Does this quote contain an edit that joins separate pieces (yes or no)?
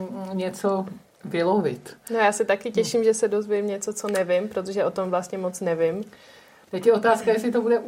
no